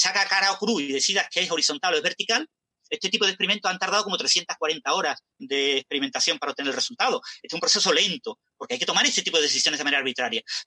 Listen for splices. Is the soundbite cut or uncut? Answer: cut